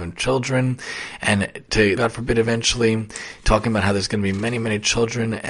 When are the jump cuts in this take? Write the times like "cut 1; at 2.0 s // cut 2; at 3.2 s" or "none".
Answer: cut 1; at 2.0 s